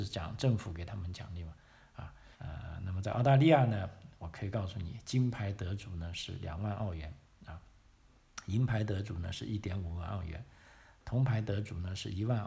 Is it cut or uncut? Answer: cut